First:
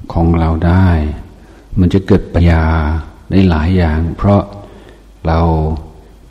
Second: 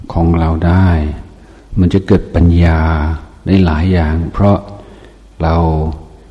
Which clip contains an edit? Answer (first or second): first